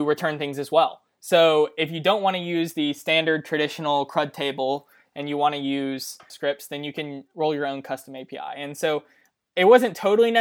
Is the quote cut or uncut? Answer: uncut